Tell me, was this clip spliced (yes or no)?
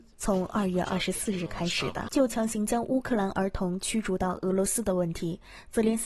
yes